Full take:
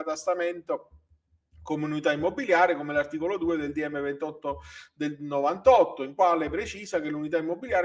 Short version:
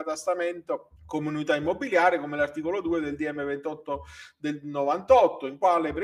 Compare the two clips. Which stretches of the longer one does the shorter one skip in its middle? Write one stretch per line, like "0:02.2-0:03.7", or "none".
0:01.0-0:01.5